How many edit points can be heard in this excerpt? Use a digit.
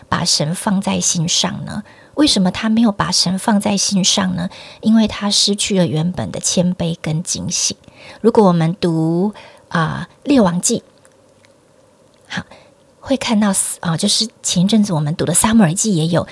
0